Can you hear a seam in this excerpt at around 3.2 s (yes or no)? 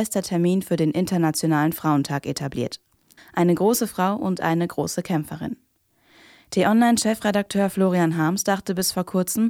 yes